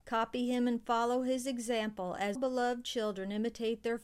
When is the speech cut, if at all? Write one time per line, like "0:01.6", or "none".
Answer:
0:02.4